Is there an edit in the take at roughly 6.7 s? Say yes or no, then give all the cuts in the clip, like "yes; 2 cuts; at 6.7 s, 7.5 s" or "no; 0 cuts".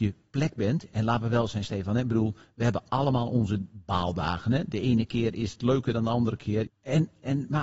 yes; 1 cut; at 6.7 s